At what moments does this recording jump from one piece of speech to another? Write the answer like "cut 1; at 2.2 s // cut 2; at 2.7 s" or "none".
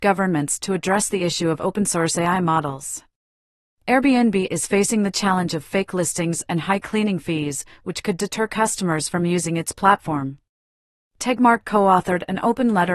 cut 1; at 3.8 s // cut 2; at 11.0 s